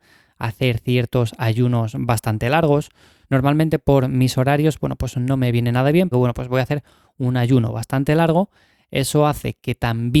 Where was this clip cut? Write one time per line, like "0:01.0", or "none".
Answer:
0:03.2
0:06.1